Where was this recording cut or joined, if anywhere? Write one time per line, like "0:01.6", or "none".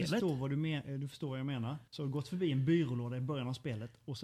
0:01.9